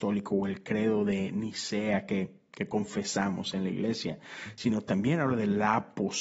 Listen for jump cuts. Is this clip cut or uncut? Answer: uncut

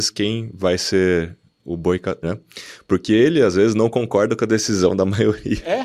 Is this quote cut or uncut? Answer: cut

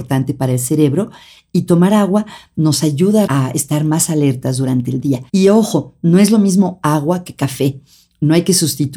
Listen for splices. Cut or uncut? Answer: cut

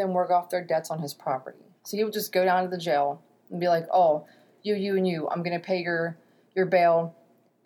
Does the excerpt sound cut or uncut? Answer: uncut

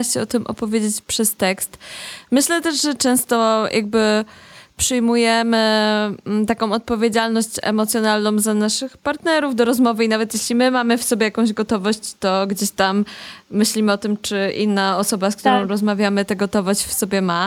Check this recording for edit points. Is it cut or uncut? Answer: uncut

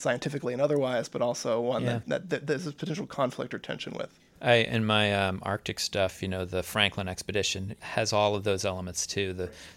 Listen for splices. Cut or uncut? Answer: uncut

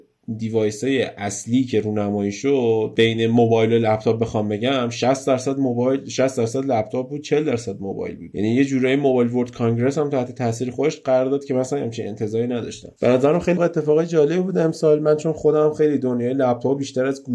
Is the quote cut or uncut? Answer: cut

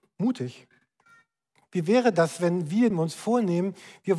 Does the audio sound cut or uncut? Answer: cut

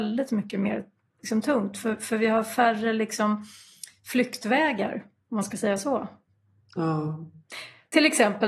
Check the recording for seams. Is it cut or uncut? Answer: uncut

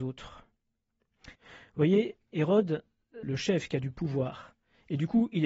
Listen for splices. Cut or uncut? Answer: cut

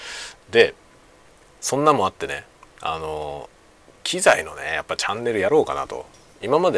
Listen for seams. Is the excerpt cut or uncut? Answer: uncut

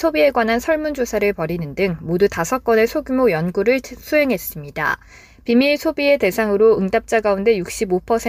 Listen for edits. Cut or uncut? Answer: uncut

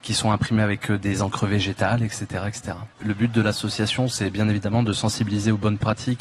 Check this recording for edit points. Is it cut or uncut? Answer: cut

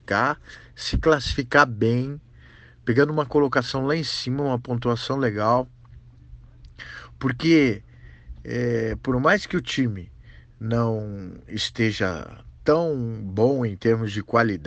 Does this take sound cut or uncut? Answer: uncut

